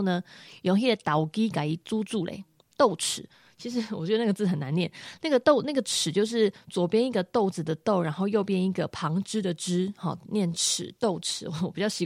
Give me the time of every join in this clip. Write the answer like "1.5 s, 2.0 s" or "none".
none